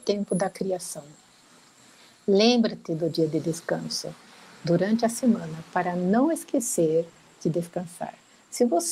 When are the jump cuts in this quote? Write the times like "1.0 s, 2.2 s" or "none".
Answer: none